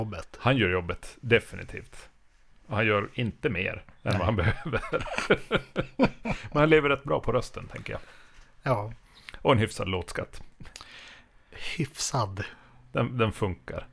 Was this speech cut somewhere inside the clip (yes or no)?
no